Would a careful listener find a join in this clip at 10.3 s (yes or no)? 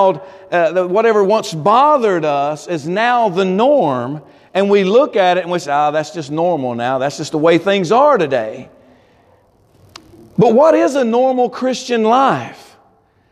no